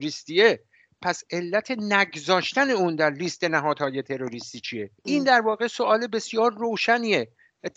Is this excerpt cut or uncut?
cut